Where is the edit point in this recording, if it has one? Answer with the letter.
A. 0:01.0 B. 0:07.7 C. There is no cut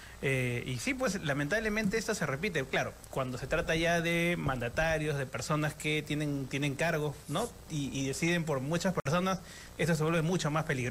C